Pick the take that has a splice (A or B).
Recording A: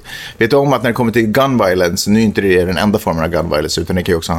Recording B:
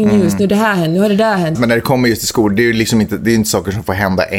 B